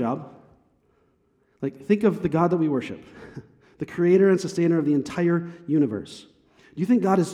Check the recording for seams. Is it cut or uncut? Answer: uncut